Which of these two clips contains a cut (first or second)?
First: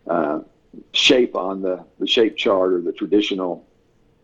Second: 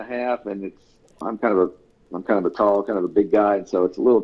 second